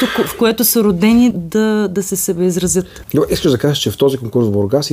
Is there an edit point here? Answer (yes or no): yes